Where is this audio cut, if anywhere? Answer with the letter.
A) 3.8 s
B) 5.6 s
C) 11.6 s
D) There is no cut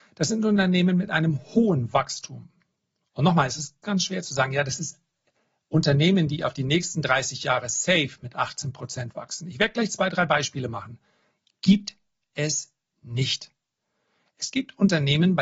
A